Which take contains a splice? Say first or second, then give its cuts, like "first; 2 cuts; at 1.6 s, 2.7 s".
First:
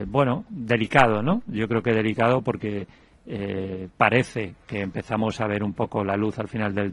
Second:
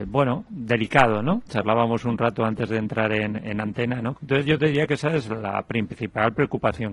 second; 2 cuts; at 1.5 s, 4.1 s